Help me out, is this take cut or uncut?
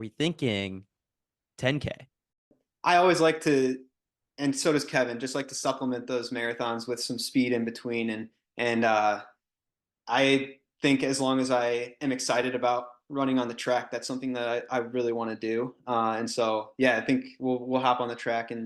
uncut